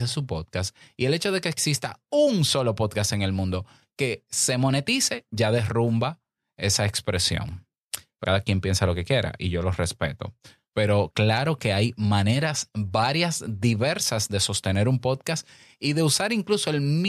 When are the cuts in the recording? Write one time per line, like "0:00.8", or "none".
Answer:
0:08.2